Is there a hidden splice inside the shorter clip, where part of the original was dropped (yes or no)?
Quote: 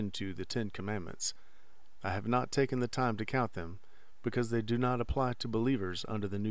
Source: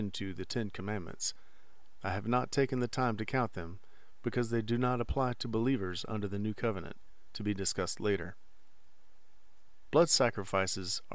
no